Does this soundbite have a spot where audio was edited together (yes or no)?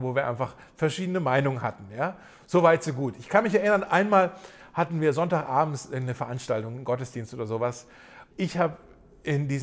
yes